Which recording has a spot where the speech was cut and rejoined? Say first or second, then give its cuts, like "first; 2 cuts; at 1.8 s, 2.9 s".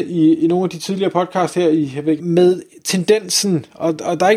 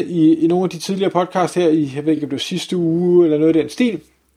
first; 1 cut; at 2.2 s